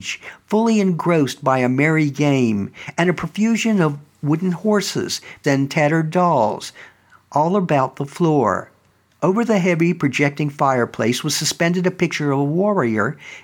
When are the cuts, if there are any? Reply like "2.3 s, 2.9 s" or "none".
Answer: 5.4 s, 9.1 s